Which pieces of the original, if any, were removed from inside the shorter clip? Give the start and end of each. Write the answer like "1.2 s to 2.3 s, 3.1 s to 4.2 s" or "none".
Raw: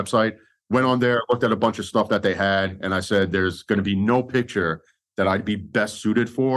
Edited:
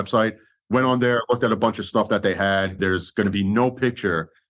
2.8 s to 3.3 s